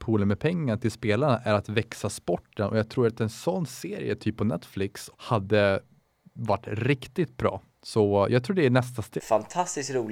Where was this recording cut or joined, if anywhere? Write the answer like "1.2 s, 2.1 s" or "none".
5.1 s, 9.2 s